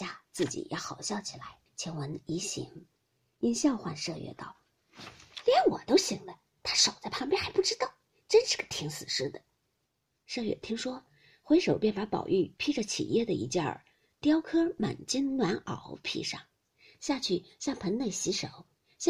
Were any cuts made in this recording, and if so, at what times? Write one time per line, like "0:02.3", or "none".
0:01.7
0:09.8